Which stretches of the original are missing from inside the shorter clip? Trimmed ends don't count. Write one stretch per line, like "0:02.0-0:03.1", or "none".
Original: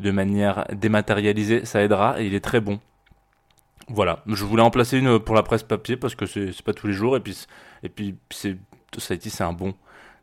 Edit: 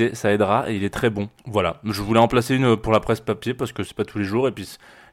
0:02.9-0:03.8
0:06.3-0:06.5